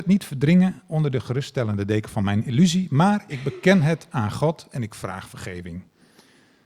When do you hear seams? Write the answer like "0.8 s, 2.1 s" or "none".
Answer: none